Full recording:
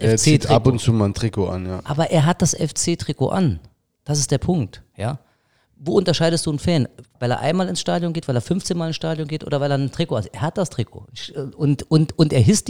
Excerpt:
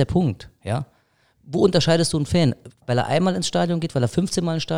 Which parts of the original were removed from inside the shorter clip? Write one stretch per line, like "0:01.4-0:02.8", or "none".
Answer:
none